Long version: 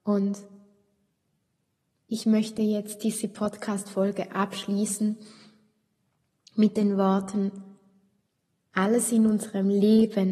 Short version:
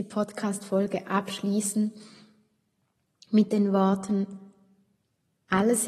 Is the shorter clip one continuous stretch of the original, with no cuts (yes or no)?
yes